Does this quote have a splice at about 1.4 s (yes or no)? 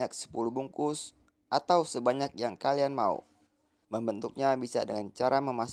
no